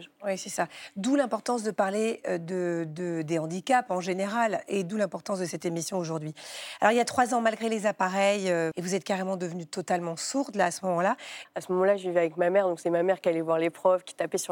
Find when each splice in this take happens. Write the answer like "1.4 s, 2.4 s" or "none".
8.7 s, 11.4 s